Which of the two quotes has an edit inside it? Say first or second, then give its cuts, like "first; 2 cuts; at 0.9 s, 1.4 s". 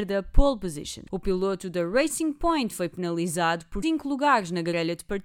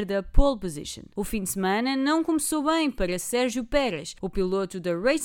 first; 2 cuts; at 1.1 s, 3.8 s